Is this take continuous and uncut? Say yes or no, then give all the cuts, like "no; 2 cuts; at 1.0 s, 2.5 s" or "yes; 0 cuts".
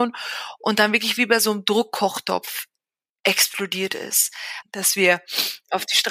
no; 1 cut; at 4.6 s